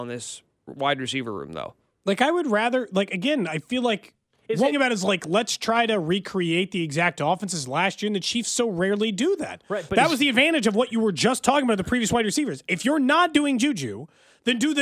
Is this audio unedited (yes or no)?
no